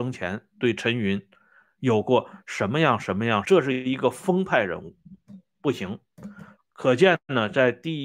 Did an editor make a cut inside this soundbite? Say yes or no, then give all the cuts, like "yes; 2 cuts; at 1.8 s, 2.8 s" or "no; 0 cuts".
yes; 2 cuts; at 3.4 s, 6.6 s